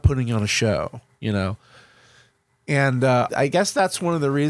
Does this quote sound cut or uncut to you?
cut